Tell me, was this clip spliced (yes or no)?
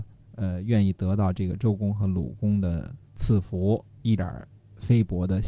yes